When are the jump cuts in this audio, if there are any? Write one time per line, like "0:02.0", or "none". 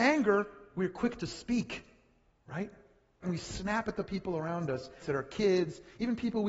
0:03.2
0:05.0